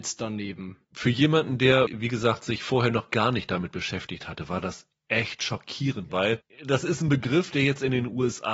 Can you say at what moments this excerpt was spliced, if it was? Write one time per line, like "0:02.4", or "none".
0:06.1